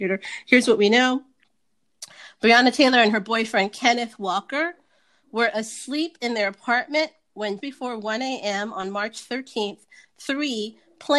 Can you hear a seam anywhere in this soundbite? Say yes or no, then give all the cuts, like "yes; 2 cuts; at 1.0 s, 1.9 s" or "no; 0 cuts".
yes; 1 cut; at 7.6 s